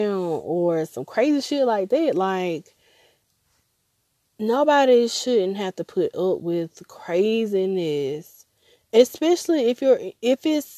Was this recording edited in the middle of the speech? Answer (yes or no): no